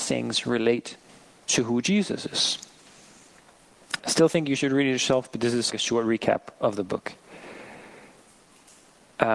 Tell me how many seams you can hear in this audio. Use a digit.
2